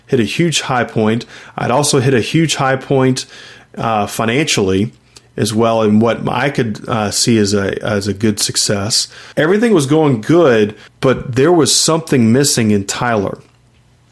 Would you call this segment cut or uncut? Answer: cut